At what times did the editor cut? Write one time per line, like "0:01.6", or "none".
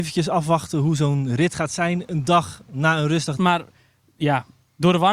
0:03.4